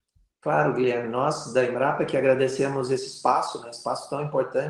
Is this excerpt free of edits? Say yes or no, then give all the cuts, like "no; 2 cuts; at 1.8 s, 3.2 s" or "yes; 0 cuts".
yes; 0 cuts